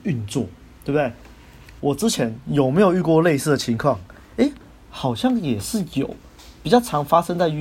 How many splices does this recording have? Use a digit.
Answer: 1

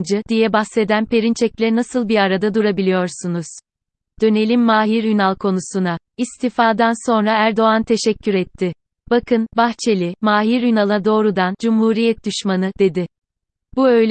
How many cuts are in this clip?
1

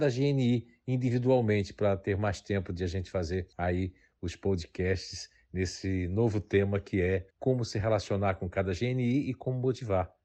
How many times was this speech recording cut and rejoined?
2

